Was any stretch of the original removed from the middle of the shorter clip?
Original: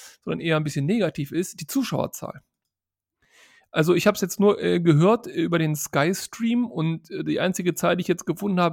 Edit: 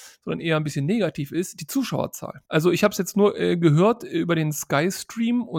yes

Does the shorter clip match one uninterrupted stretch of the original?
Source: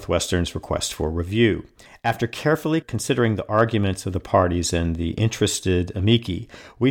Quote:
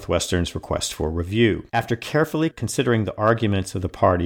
no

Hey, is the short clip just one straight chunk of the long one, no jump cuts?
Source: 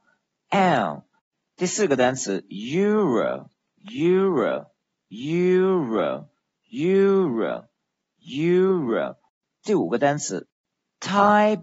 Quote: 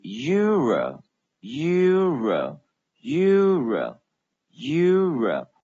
no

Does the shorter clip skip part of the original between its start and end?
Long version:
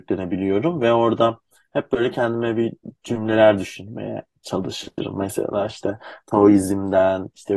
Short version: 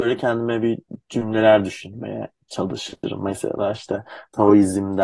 no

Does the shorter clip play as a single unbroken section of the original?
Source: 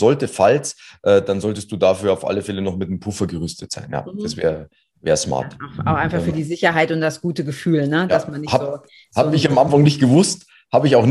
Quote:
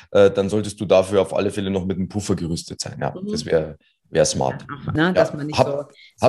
no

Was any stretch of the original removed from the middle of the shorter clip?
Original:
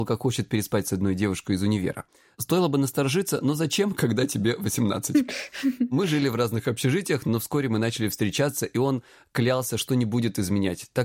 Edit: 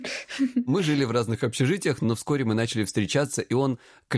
no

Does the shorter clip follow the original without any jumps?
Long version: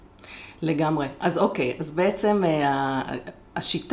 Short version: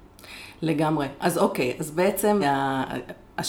no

